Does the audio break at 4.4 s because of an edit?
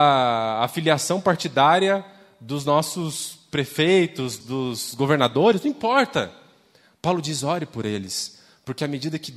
yes; 1 cut; at 4.4 s

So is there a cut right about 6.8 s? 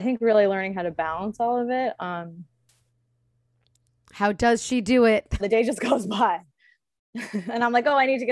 no; 1 cut; at 5.4 s

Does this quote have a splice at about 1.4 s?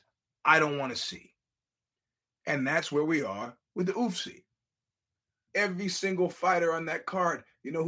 no; 1 cut; at 5.5 s

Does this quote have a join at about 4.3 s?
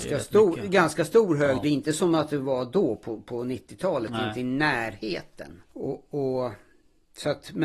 no; 2 cuts; at 1.6 s, 5.7 s

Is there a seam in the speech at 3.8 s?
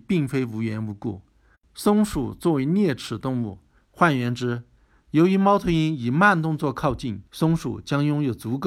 yes; 2 cuts; at 3.8 s, 7.3 s

